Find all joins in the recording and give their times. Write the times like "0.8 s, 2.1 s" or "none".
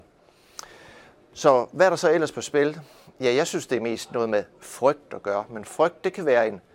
none